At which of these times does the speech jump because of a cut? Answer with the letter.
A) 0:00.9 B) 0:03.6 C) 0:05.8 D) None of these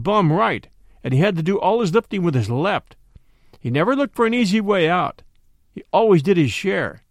D